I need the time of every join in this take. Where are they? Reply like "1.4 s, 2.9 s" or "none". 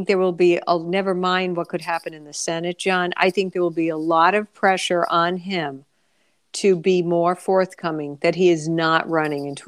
none